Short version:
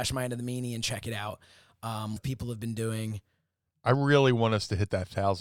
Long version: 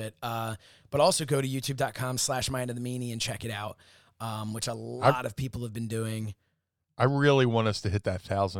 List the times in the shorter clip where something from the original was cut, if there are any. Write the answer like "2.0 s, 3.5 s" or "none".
2.2 s